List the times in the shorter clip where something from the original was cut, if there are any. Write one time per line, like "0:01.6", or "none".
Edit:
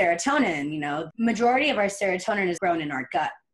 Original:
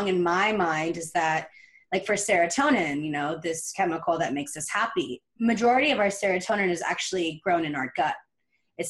0:01.1
0:02.6